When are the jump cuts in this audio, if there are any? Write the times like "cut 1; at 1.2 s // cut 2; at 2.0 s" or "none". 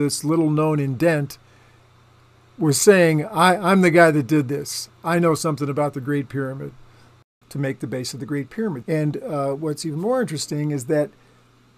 cut 1; at 7.4 s // cut 2; at 8.8 s